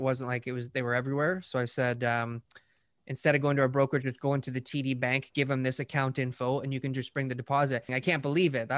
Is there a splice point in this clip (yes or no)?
yes